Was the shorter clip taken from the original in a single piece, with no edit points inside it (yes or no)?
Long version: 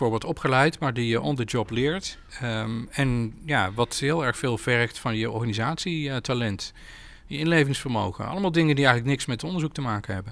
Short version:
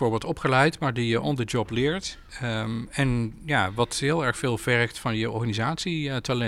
yes